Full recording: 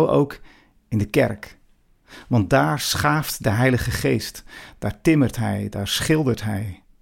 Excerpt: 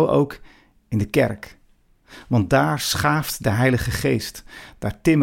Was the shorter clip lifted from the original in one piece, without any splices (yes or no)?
yes